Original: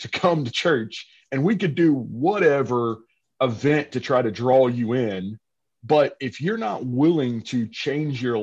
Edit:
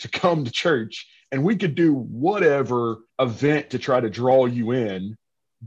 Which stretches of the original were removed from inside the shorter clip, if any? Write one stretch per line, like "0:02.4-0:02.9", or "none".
0:03.1-0:03.3

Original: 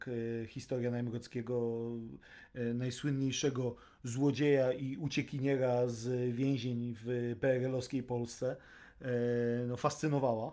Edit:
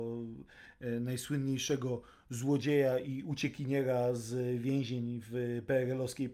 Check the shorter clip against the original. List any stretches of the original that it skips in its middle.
none

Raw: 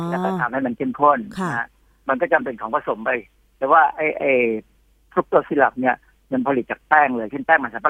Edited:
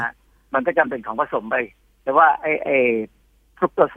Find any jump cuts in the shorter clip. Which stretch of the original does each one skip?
none

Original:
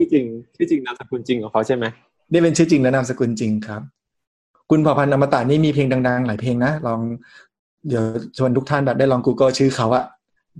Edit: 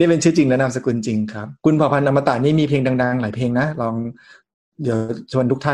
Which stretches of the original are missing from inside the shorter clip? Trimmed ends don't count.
0:03.9-0:04.6

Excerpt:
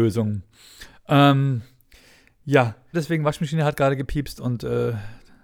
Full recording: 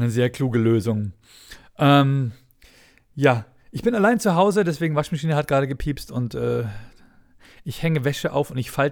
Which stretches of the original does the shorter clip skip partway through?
0:03.6-0:04.6

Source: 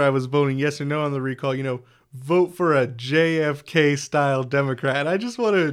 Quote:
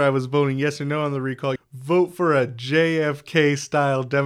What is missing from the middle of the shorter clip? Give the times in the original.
0:01.6-0:02.0

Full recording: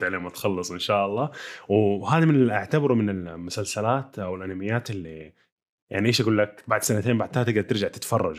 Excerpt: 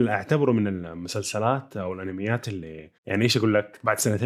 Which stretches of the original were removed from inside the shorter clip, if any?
0:05.4-0:05.8

